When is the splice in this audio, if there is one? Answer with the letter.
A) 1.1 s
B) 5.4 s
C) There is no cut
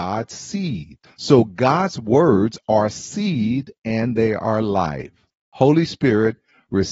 B